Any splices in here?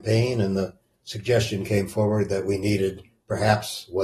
no; 0 cuts

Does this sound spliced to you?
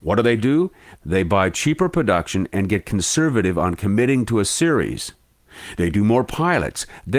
no; 0 cuts

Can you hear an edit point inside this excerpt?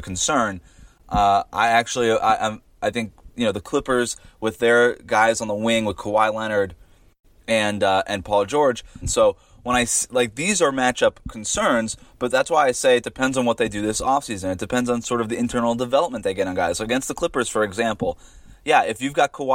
yes; 1 cut; at 9.0 s

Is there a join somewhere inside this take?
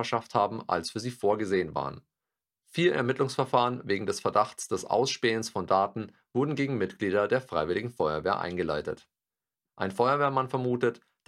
yes; 1 cut; at 9.7 s

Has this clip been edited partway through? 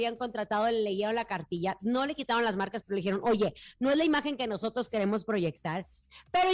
no; 0 cuts

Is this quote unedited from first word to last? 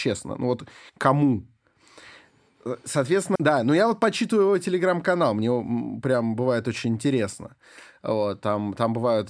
no; 1 cut; at 3.4 s

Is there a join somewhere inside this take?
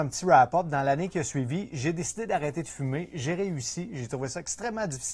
no; 0 cuts

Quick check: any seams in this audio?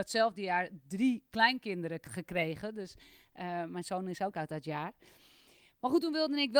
no; 0 cuts

